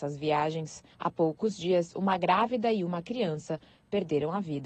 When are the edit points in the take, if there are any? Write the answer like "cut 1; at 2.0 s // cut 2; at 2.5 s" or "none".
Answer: cut 1; at 0.9 s